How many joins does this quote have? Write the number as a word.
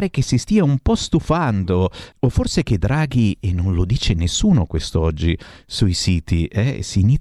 one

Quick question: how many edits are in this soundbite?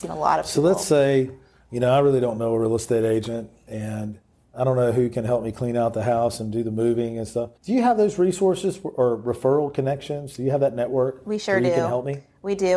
one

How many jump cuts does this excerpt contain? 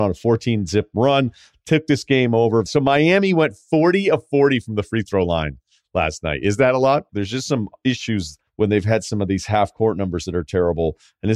three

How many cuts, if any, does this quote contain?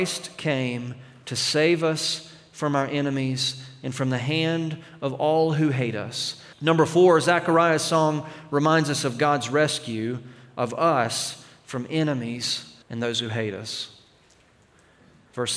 two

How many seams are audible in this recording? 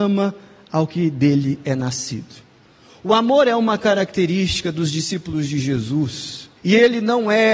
one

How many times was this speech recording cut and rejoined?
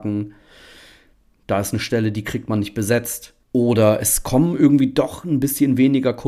two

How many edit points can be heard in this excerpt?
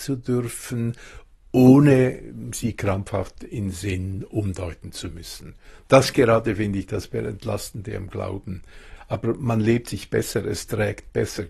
one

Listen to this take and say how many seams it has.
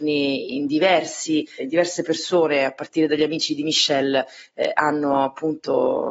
one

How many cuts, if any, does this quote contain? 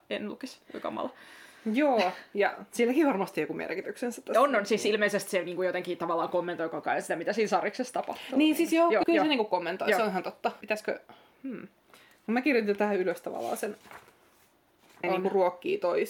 three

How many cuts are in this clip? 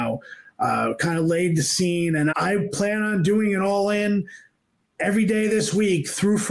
one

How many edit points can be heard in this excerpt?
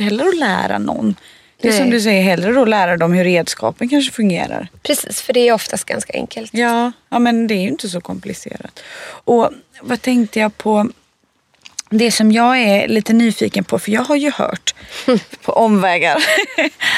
zero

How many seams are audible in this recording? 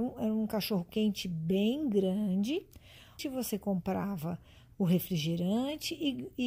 one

